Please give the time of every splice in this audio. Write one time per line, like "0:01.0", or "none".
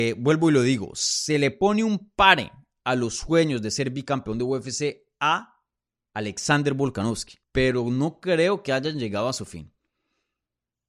0:07.4